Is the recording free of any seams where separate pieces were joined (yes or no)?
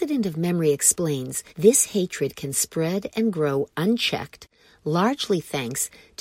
no